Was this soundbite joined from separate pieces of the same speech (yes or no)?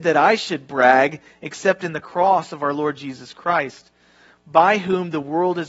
no